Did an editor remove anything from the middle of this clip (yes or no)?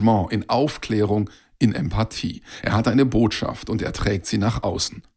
no